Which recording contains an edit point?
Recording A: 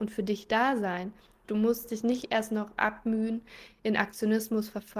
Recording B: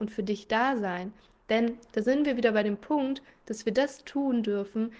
A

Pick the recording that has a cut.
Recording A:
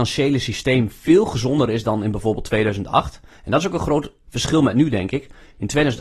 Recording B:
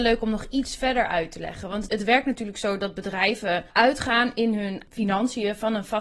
B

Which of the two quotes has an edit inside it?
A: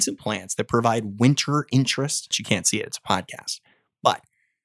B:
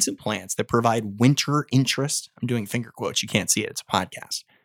A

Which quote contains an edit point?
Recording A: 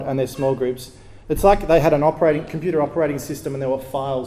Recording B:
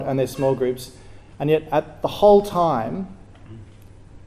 A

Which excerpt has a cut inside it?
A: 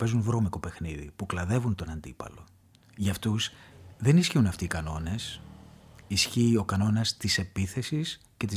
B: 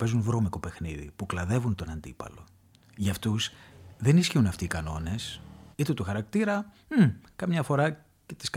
B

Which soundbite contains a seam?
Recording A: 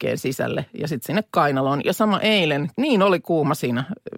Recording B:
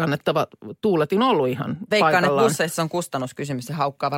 A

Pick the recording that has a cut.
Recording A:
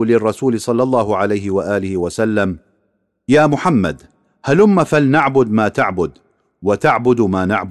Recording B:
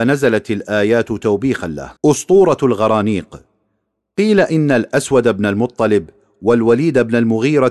B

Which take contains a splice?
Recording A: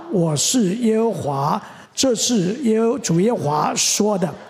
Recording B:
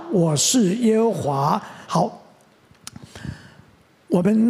B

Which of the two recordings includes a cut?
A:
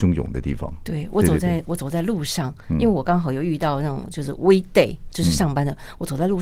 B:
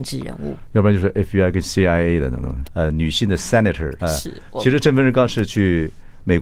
B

